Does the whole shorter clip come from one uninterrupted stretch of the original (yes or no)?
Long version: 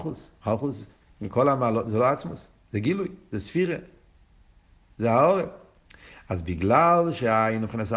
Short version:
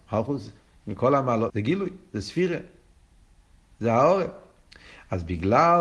no